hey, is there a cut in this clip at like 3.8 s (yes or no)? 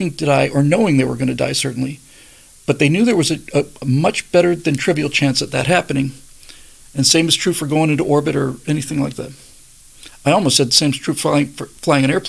yes